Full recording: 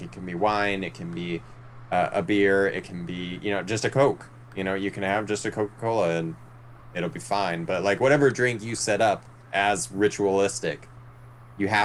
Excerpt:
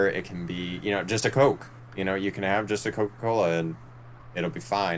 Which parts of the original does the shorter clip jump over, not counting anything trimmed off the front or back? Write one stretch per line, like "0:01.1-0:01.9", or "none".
none